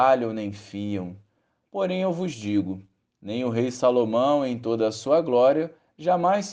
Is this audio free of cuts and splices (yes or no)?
yes